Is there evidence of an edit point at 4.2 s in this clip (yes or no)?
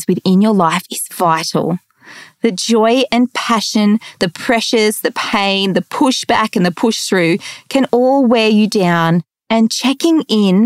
no